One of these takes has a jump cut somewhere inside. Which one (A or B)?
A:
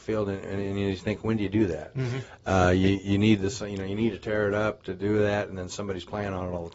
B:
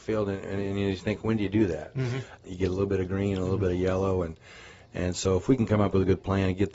B